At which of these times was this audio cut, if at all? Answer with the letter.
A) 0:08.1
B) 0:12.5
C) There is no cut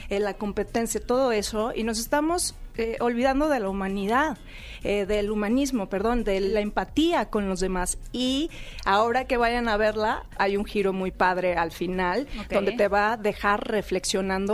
C